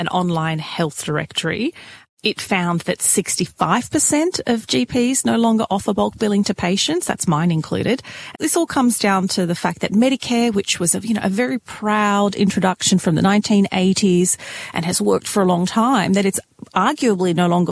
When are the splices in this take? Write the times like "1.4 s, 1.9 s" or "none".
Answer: 8.3 s